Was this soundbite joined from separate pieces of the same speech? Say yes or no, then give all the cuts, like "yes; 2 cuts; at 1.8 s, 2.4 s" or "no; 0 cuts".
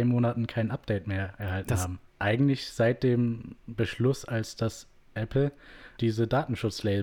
yes; 2 cuts; at 2.1 s, 6.0 s